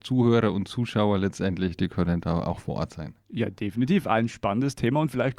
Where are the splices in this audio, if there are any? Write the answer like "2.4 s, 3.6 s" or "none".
none